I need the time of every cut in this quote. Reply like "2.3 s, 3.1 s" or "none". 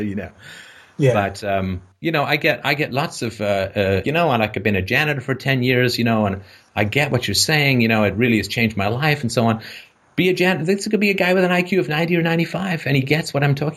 4.0 s